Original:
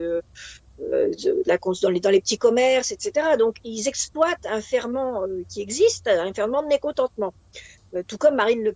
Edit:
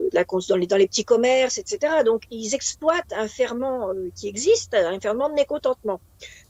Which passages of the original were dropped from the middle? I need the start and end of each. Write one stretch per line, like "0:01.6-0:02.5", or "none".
none